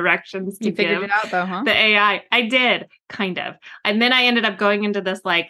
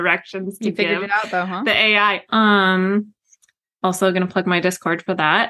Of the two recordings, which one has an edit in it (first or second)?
second